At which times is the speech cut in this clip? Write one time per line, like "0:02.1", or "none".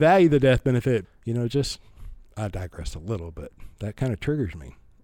0:01.0
0:02.3

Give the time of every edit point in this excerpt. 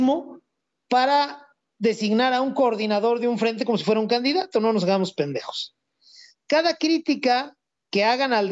0:06.3

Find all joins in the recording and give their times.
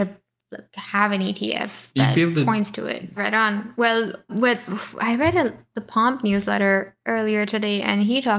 0:03.2
0:04.3

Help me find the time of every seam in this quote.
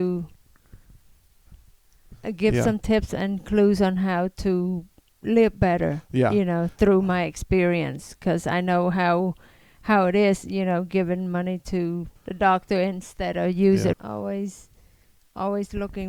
0:12.2
0:13.9

